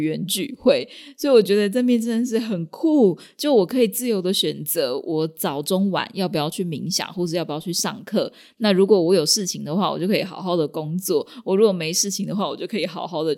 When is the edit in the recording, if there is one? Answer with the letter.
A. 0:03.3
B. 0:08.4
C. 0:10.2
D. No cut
D